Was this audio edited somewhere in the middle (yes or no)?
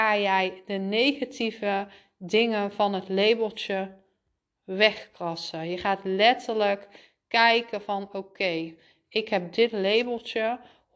no